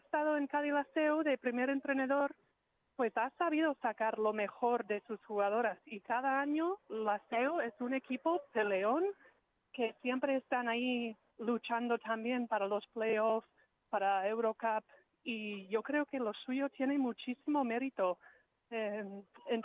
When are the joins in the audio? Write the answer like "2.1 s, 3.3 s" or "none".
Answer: none